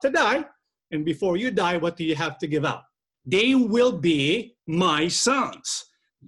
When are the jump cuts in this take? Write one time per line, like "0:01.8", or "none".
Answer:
0:03.1
0:04.6